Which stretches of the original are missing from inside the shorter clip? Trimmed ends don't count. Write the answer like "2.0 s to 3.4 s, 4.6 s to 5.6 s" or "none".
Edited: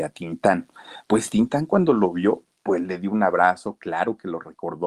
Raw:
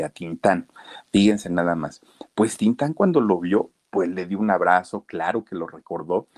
1.0 s to 2.3 s